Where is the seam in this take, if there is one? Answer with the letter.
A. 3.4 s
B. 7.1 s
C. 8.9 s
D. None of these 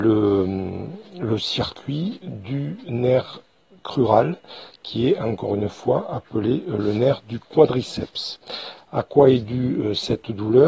D